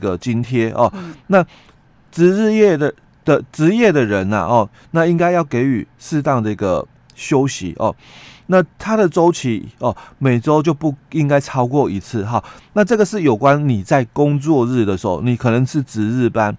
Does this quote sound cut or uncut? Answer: uncut